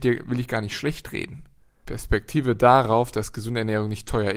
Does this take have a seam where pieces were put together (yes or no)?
yes